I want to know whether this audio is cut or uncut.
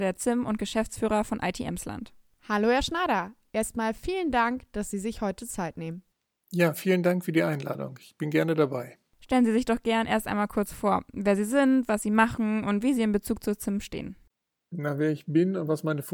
uncut